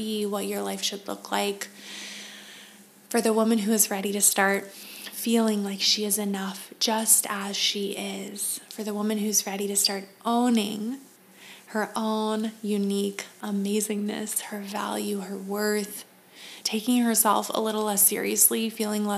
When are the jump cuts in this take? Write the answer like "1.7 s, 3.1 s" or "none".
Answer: 14.4 s, 16.6 s